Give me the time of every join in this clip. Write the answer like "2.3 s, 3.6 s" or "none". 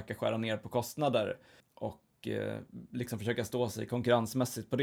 none